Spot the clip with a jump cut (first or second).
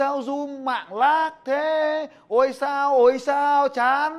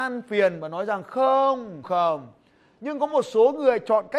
second